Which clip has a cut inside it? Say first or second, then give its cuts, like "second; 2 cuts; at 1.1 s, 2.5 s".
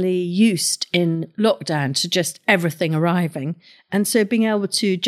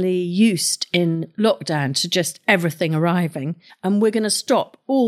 second; 1 cut; at 3.7 s